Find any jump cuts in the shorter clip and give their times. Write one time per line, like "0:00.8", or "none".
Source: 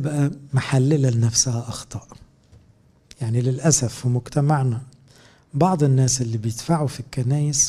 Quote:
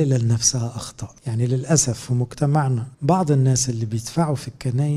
0:01.2
0:02.9